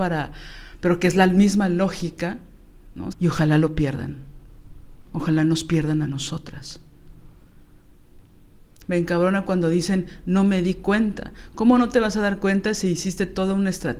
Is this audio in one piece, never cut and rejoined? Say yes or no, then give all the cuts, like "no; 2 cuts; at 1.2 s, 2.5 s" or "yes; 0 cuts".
no; 2 cuts; at 3.1 s, 8.8 s